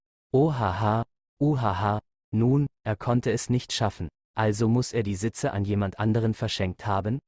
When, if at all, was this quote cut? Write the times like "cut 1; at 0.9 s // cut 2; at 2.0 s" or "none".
none